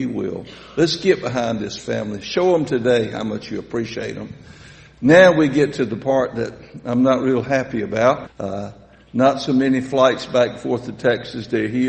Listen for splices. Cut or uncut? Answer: cut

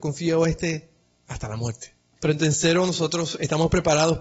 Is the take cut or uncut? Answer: cut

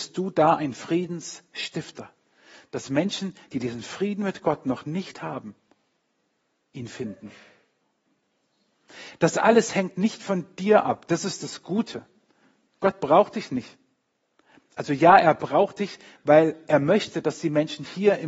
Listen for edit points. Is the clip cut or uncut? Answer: uncut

